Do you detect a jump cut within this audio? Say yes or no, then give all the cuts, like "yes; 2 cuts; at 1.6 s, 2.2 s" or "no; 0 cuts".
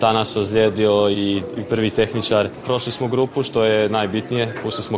yes; 2 cuts; at 1.1 s, 2.6 s